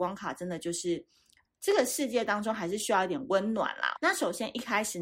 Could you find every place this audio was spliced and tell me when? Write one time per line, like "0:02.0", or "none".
0:01.5
0:04.0